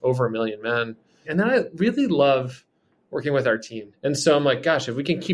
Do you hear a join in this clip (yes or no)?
yes